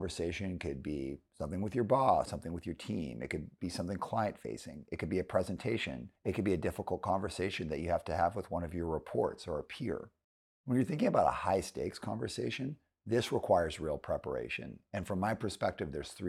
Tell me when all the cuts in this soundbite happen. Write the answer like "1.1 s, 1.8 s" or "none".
2.3 s